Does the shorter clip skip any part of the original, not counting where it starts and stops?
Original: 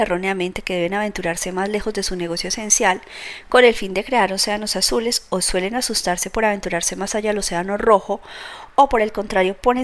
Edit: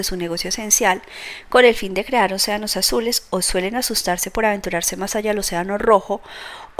no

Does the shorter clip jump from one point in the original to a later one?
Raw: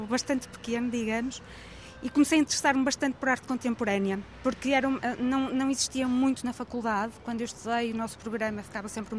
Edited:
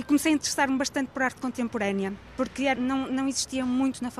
yes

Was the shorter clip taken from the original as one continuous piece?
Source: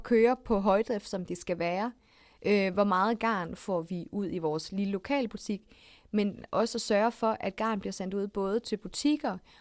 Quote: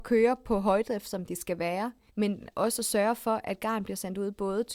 no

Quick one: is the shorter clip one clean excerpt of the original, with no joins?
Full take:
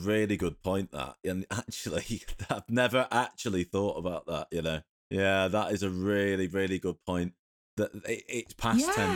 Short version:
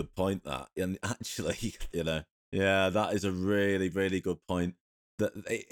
no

